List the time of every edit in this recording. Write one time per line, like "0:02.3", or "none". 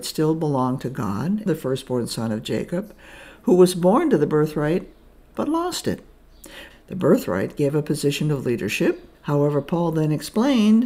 0:01.5
0:06.7
0:09.1